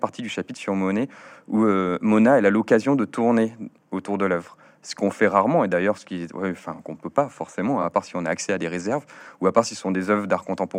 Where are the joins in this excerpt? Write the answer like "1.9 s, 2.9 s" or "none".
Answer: none